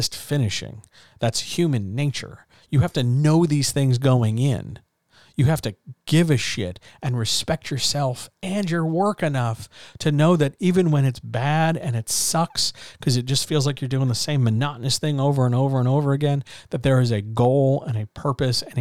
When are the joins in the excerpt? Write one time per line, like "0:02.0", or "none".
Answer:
none